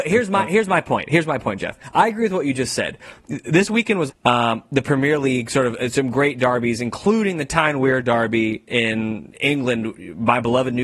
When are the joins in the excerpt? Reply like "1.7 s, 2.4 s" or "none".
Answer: 4.1 s, 8.7 s